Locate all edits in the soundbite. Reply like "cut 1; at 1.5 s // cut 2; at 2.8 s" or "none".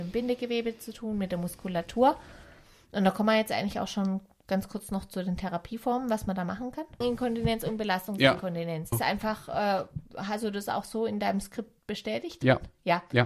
cut 1; at 7.0 s // cut 2; at 8.9 s